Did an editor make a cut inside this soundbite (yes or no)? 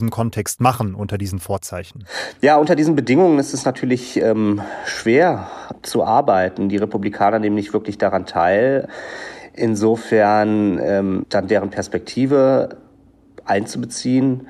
yes